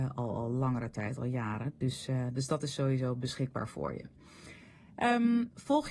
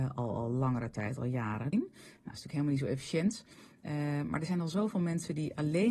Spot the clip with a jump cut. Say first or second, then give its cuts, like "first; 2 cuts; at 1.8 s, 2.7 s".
second; 1 cut; at 1.7 s